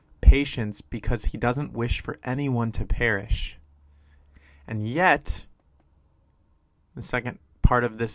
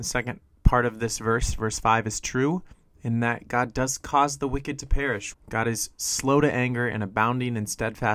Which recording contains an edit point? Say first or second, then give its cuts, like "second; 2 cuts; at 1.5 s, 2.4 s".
second; 1 cut; at 5.3 s